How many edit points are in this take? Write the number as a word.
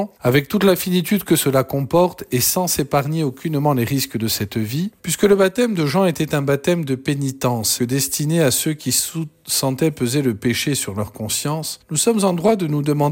two